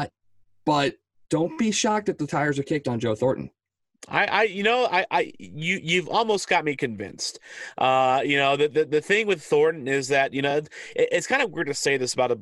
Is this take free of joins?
yes; 0 cuts

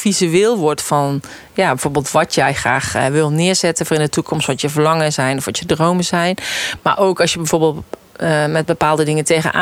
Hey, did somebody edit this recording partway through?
no; 0 cuts

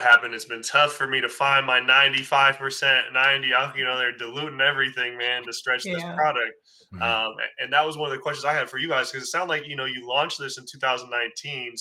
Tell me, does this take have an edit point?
no; 0 cuts

